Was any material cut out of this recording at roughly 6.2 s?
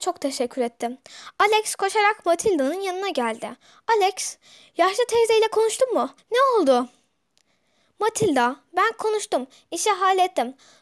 yes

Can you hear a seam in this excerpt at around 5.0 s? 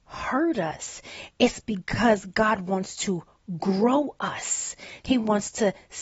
yes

